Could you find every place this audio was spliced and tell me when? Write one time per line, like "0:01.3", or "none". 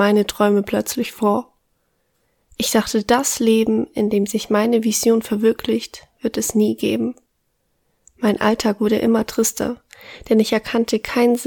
none

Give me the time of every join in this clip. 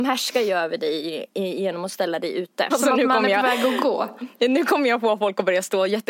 0:02.7

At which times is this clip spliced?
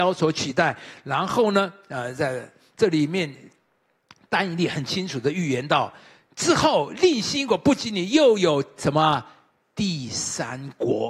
none

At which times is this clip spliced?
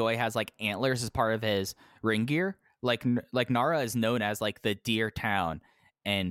none

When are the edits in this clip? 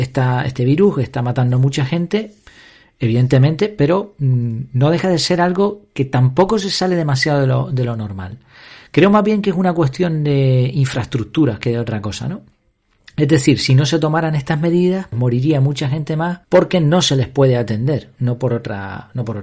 0:15.1
0:16.4

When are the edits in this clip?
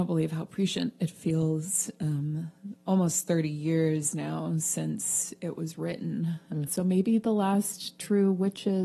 0:06.7

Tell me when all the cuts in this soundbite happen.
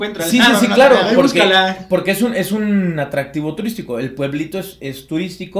none

